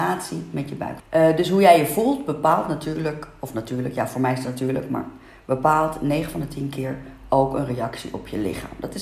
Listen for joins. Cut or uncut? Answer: cut